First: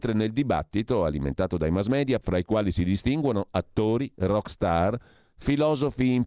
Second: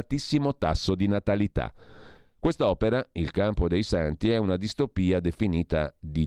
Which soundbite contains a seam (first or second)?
first